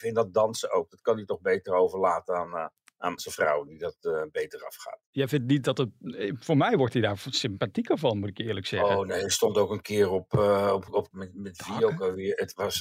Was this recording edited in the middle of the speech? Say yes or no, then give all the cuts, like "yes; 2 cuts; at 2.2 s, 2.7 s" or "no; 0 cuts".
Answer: yes; 2 cuts; at 3.2 s, 11.1 s